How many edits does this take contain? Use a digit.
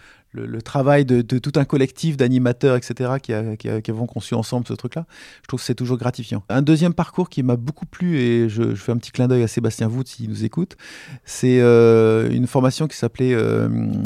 0